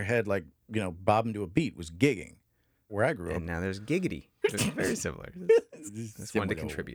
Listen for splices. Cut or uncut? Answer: cut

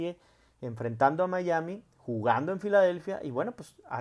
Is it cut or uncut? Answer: uncut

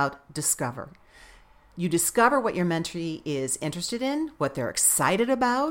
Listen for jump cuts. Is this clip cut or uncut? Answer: uncut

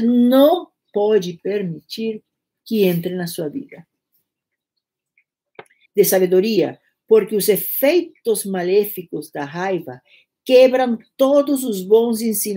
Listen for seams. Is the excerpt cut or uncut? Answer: cut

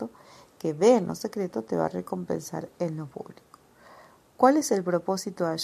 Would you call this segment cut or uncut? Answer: uncut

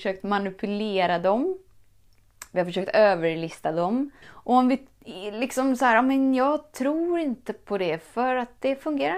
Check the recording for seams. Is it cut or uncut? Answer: cut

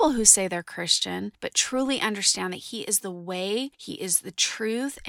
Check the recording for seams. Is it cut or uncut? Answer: uncut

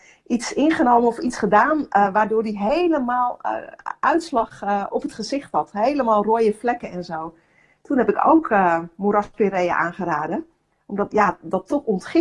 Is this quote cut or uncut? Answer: uncut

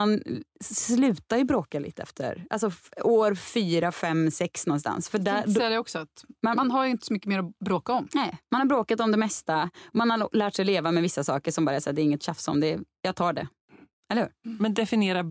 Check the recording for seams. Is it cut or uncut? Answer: uncut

